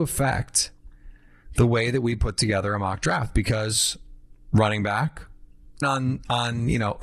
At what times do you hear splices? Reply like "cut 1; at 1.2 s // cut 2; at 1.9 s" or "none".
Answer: cut 1; at 5.8 s